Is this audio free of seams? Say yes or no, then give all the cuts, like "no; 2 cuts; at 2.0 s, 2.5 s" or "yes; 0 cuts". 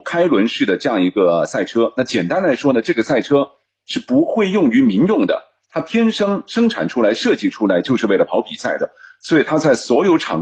yes; 0 cuts